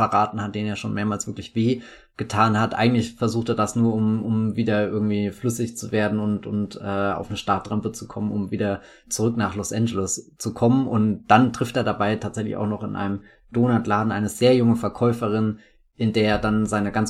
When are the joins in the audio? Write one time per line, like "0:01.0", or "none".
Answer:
none